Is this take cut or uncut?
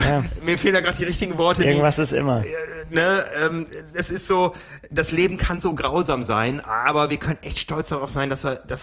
uncut